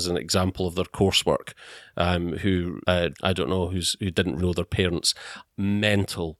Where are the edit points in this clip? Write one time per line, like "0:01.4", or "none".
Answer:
0:03.1
0:04.4
0:05.4